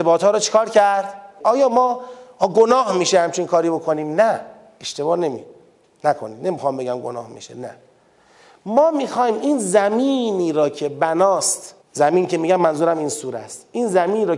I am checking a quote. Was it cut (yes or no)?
yes